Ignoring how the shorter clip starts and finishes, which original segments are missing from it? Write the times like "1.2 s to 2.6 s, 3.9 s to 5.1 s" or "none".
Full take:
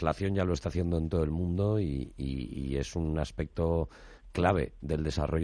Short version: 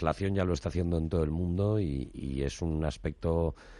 2.1 s to 2.5 s

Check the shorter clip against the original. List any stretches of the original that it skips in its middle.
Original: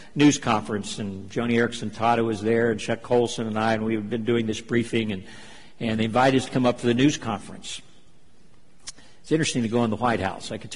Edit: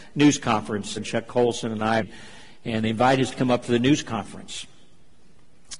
1.0 s to 2.7 s, 3.7 s to 5.1 s

